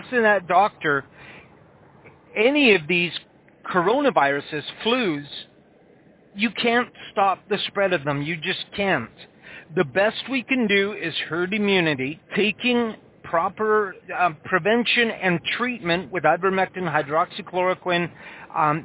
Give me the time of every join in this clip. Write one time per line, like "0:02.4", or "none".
0:12.2